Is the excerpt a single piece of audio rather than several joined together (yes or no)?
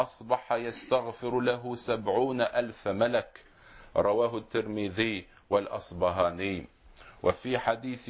yes